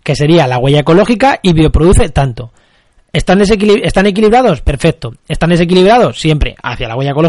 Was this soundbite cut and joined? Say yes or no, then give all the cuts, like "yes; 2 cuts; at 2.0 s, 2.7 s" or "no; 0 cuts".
no; 0 cuts